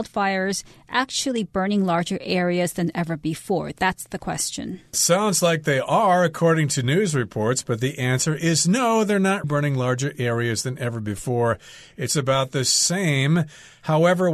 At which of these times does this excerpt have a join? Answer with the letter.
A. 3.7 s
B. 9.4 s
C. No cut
B